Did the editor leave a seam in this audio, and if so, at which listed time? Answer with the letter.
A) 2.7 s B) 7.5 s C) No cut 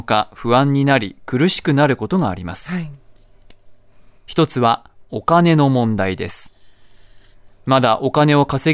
C